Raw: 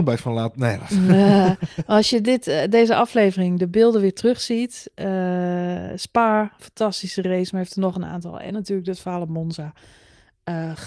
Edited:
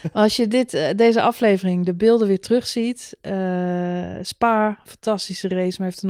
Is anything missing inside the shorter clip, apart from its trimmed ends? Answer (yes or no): no